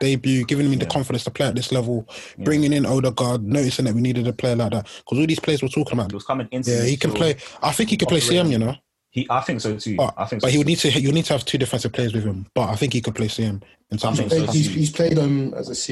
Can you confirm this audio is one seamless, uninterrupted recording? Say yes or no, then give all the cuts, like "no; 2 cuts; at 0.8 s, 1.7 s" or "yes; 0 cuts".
no; 1 cut; at 6.1 s